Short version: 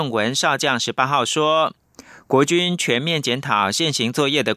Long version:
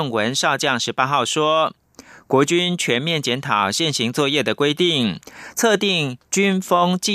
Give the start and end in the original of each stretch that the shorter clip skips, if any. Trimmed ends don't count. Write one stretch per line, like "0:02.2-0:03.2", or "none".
none